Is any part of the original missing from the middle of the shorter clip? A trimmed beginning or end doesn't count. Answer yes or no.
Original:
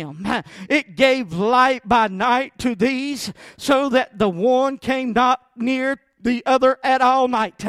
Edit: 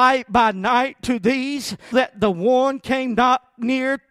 yes